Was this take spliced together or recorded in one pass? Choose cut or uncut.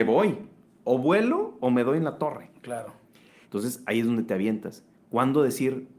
cut